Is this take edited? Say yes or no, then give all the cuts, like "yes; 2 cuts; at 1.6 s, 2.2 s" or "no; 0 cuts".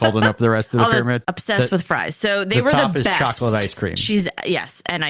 yes; 1 cut; at 1.2 s